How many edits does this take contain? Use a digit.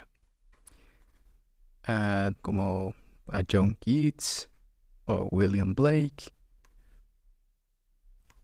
1